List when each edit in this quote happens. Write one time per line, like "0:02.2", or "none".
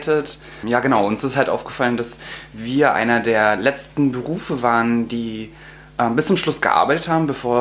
none